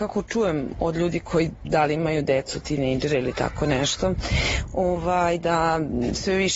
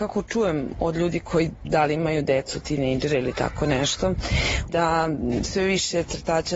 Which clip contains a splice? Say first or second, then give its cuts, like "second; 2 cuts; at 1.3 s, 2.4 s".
second; 1 cut; at 4.7 s